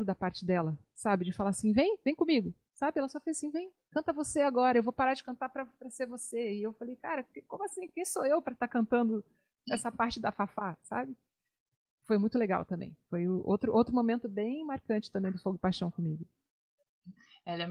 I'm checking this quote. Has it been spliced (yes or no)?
no